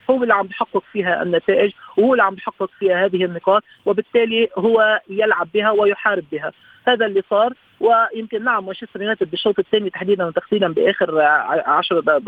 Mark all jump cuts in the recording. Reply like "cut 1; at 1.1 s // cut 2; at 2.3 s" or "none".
none